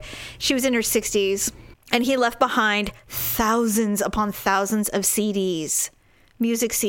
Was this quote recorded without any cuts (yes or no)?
yes